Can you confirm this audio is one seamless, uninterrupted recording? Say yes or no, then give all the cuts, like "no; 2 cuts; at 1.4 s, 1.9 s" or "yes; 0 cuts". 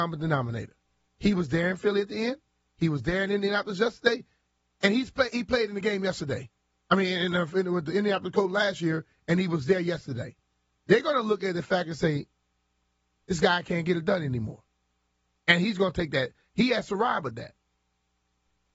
yes; 0 cuts